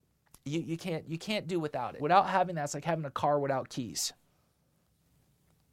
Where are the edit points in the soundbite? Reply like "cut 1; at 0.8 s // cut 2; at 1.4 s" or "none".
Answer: cut 1; at 2.0 s